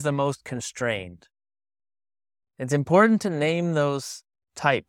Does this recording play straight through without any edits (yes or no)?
no